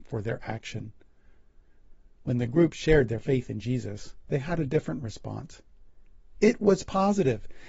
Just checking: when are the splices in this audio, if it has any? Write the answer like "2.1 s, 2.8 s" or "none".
none